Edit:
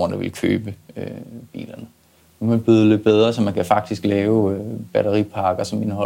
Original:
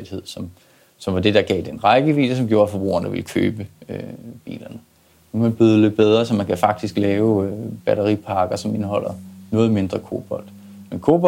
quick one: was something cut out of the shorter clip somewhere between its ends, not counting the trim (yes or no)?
no